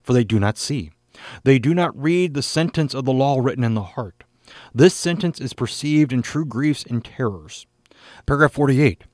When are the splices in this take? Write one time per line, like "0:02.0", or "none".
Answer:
0:08.2

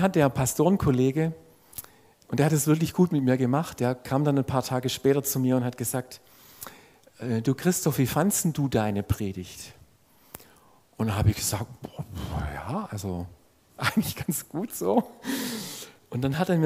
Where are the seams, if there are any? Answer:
none

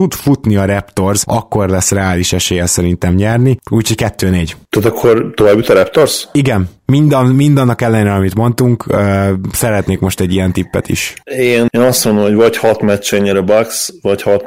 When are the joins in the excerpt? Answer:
0:11.7

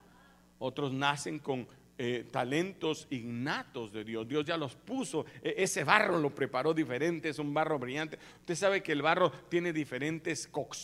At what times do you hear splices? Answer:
none

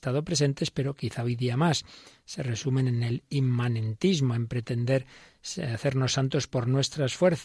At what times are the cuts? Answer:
none

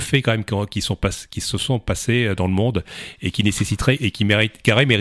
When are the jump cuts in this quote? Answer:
none

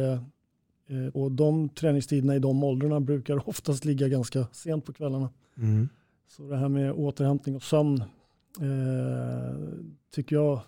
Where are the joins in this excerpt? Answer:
0:01.1

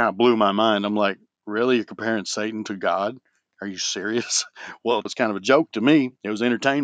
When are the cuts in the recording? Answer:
0:05.1

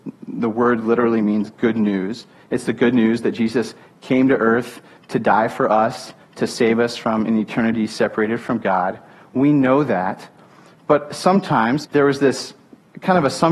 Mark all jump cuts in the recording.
0:11.8

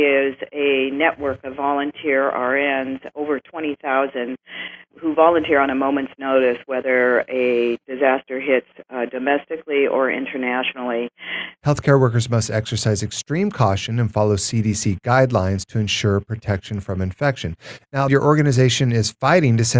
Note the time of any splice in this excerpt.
0:03.1
0:11.6
0:18.1

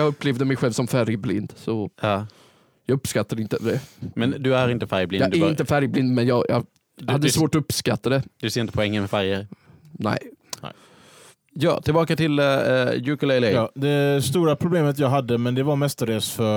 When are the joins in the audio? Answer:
none

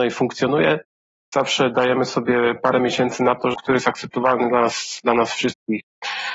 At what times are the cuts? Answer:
0:03.5

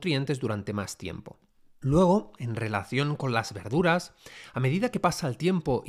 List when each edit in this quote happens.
0:01.8

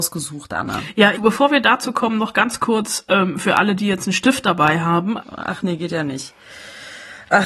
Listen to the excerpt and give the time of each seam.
0:01.1
0:05.2

